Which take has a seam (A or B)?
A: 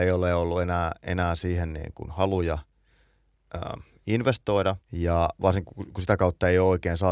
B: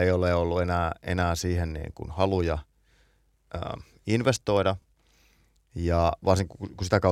A